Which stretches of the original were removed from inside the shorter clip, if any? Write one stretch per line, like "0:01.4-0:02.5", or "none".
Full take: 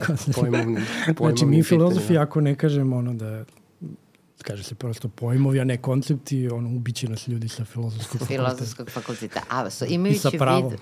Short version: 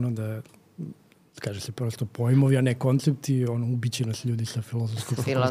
none